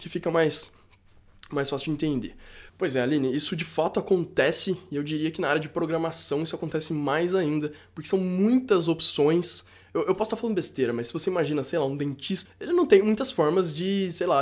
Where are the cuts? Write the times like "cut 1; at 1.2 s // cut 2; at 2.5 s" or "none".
cut 1; at 2.7 s // cut 2; at 12.4 s